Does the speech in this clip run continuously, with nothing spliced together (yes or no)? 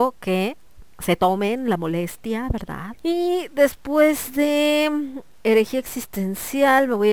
no